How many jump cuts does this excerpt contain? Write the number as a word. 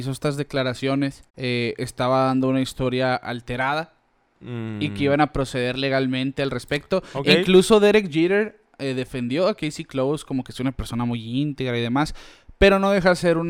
one